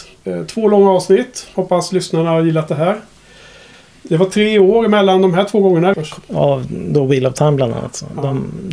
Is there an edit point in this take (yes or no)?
yes